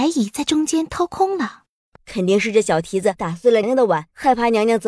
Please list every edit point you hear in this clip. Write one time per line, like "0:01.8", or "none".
0:02.0
0:03.6